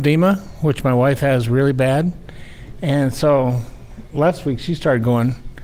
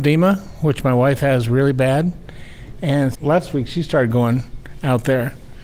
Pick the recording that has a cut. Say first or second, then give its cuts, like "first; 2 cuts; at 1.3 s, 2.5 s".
second; 1 cut; at 3.1 s